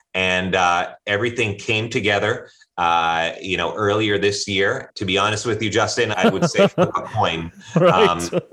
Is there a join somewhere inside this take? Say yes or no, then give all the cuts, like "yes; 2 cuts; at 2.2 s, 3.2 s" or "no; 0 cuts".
yes; 2 cuts; at 4.9 s, 6.1 s